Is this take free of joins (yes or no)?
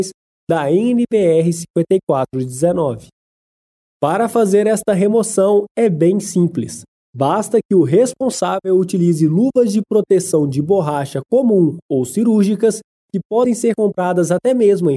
yes